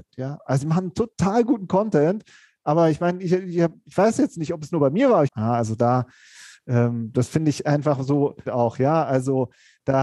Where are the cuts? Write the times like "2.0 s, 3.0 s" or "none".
5.3 s, 8.5 s

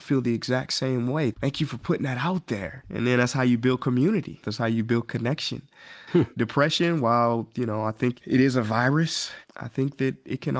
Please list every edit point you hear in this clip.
4.4 s, 6.1 s

